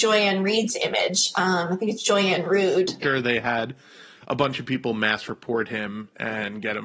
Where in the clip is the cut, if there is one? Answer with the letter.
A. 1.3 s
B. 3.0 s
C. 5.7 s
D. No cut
B